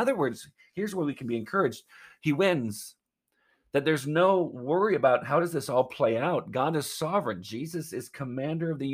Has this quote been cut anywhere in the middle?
no; 0 cuts

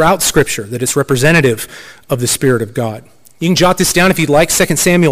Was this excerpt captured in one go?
yes; 0 cuts

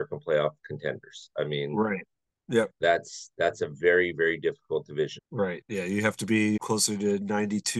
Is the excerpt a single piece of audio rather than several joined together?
no; 2 cuts; at 5.2 s, 6.6 s

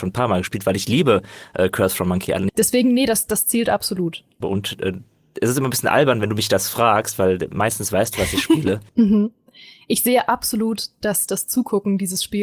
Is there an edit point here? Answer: yes; 3 cuts; at 2.5 s, 4.4 s, 8.9 s

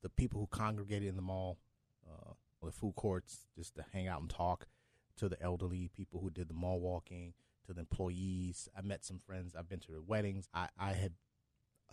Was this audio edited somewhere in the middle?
yes; 2 cuts; at 2.6 s, 10.5 s

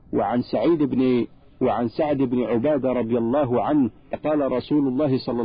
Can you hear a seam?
yes; 1 cut; at 4.1 s

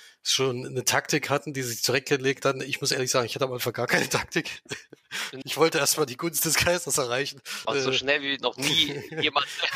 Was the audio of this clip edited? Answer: yes; 2 cuts; at 5.4 s, 7.6 s

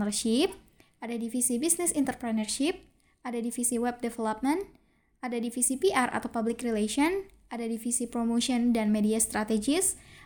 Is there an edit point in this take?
no; 0 cuts

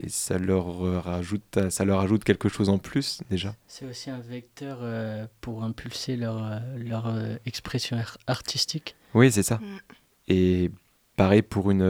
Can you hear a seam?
no; 0 cuts

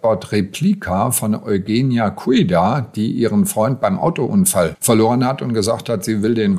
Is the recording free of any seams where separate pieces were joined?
yes; 0 cuts

